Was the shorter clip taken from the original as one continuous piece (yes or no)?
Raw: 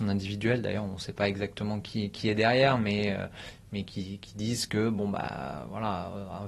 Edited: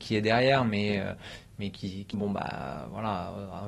no